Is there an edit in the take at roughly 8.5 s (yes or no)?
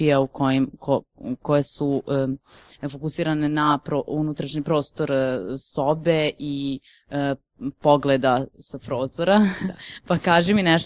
yes